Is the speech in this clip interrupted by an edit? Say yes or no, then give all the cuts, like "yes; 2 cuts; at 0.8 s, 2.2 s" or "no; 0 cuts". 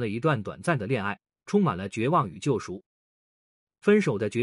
no; 0 cuts